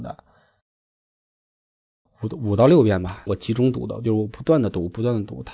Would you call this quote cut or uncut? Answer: cut